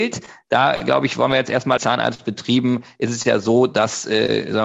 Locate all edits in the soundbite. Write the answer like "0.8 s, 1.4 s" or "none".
1.8 s

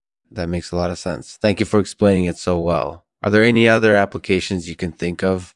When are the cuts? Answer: none

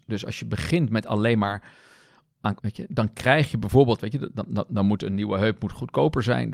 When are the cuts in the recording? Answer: 2.6 s

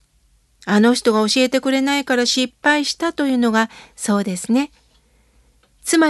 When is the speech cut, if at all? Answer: none

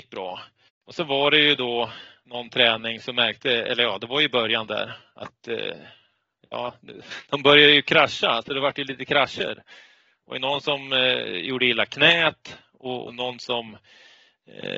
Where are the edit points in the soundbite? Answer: 7.2 s, 13.1 s

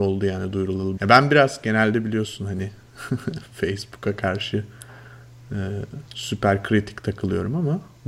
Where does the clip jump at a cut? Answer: 1.0 s, 6.1 s

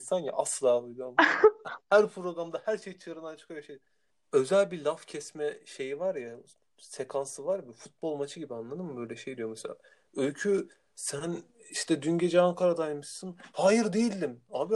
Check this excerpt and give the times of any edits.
4.1 s

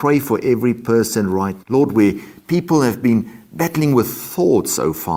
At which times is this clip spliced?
1.6 s

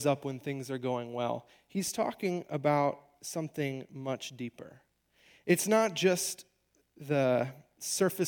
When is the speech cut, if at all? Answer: none

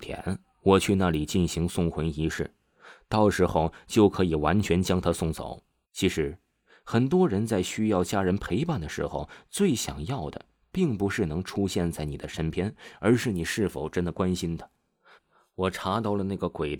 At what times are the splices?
5.8 s, 15.2 s

